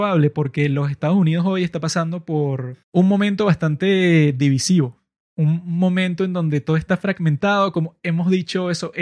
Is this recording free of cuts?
no; 1 cut; at 2.8 s

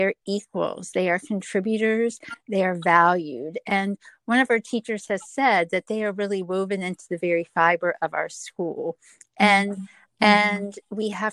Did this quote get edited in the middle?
yes; 1 cut; at 10.1 s

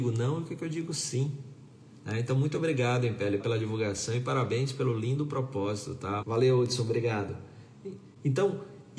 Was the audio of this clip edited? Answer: yes; 2 cuts; at 3.4 s, 6.2 s

